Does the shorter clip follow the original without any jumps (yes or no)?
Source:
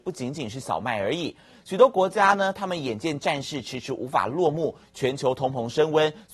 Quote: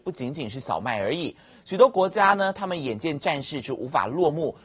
no